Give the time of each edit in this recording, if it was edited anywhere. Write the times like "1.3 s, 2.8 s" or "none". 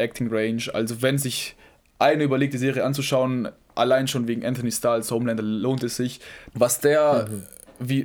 6.5 s